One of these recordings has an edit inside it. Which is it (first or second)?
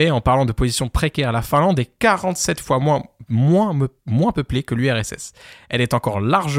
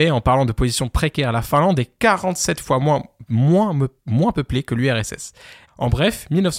second